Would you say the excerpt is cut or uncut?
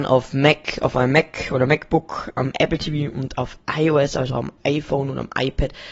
uncut